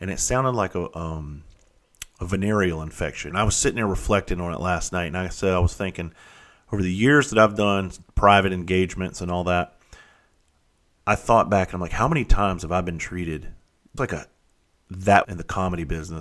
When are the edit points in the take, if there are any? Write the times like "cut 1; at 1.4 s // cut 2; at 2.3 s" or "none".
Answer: cut 1; at 3.3 s // cut 2; at 14.0 s // cut 3; at 15.2 s